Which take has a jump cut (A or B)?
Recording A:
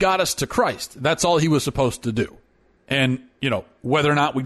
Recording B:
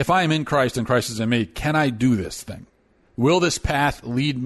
A